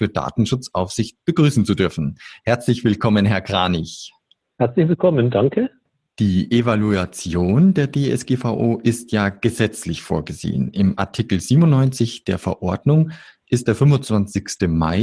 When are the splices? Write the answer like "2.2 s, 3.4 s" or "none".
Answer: none